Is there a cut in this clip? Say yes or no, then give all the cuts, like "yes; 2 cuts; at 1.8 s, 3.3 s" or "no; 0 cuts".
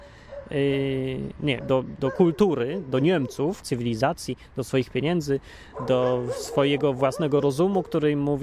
yes; 2 cuts; at 1.6 s, 3.6 s